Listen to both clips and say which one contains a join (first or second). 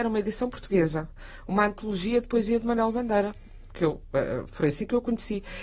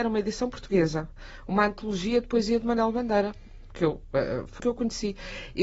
second